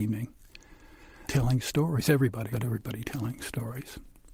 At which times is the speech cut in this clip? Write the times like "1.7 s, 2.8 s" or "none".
1.3 s, 2.5 s